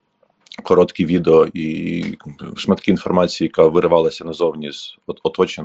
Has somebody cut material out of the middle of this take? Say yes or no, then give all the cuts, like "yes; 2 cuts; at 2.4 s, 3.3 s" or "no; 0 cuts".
no; 0 cuts